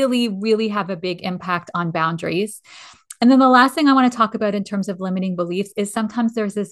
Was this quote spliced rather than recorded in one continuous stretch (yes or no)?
no